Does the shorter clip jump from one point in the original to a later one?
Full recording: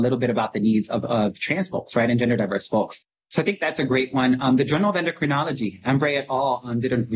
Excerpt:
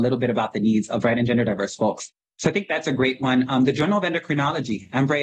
yes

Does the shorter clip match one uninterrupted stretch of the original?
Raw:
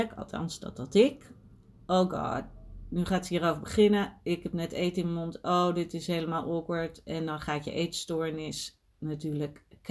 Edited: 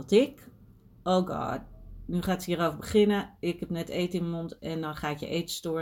no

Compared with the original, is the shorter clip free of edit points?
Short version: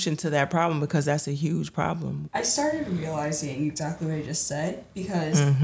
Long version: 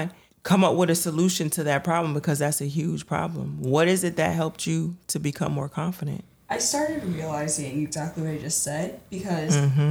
no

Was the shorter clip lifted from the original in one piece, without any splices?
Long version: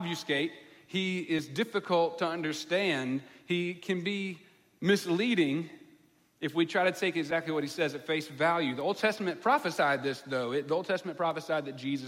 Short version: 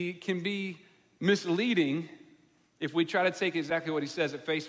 yes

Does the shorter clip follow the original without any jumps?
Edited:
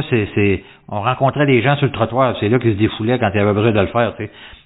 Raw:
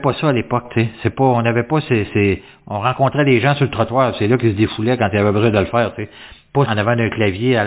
yes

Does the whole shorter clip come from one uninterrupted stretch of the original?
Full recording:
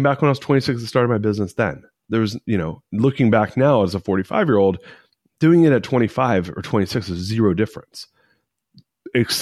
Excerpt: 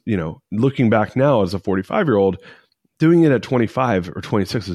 yes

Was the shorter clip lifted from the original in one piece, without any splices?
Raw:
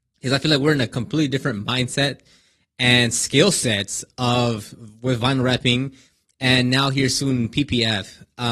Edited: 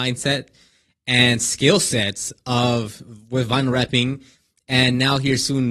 yes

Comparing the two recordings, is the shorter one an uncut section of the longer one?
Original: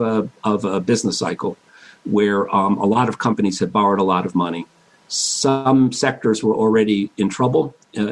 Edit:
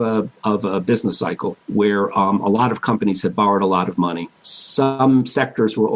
no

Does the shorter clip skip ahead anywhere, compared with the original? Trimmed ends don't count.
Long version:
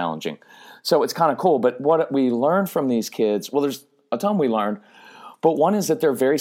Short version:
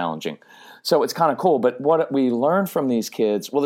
no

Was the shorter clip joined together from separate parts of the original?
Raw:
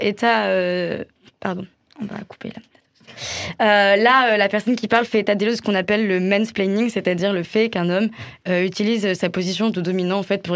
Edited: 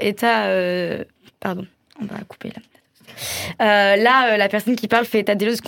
no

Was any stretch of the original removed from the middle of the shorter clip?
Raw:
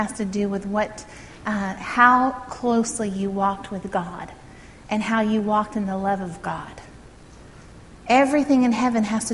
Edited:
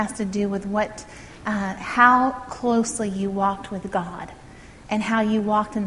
no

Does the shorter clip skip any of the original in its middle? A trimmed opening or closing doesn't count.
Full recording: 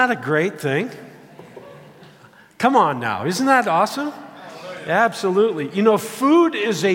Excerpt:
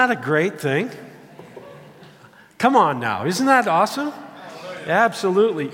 no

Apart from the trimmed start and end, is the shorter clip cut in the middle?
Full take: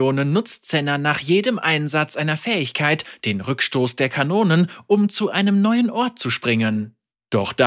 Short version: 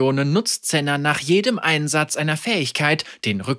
no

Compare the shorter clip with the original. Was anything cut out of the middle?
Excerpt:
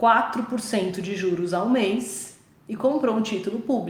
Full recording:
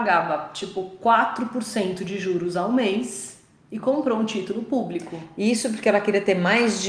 no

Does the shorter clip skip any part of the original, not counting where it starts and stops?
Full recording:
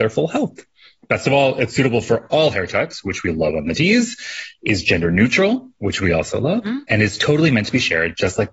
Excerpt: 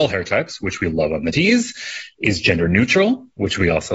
no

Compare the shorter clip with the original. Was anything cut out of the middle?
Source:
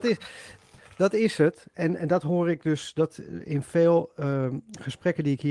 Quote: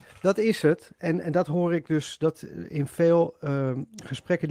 no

